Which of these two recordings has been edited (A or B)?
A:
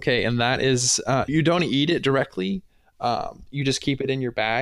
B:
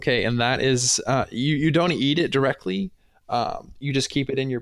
A